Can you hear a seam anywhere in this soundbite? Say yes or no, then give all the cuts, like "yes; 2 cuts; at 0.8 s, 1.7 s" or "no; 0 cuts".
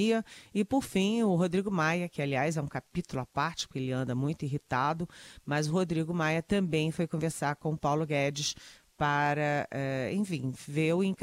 no; 0 cuts